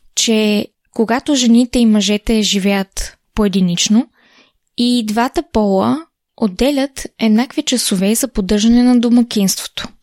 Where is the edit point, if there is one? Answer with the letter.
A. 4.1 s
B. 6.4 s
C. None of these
C